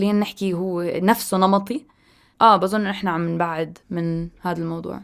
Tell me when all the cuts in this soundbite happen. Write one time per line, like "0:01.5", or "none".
none